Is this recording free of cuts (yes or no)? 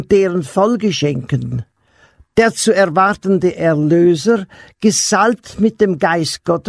yes